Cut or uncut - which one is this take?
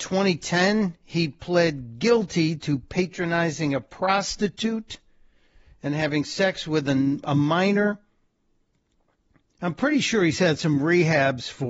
uncut